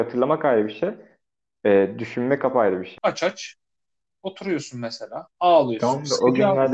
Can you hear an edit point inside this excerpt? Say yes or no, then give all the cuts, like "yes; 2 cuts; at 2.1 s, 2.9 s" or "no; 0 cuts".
yes; 1 cut; at 3.0 s